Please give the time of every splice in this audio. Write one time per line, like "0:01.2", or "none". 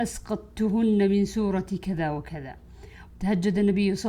0:03.1